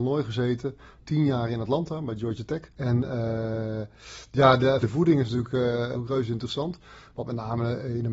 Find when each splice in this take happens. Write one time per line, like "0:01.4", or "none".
0:02.7
0:04.8
0:05.9